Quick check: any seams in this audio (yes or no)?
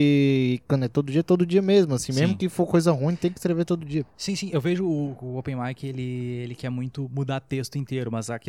no